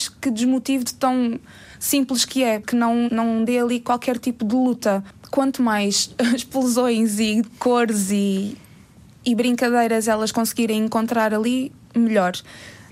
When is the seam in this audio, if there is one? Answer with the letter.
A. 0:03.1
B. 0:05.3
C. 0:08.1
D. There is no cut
A